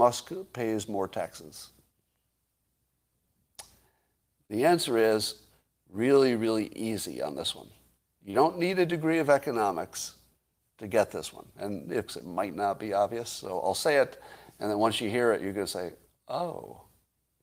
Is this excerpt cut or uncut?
cut